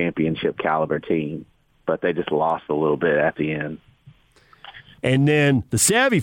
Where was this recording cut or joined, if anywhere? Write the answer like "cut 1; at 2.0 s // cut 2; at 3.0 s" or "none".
cut 1; at 5.0 s